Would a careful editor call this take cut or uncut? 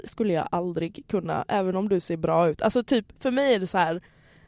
uncut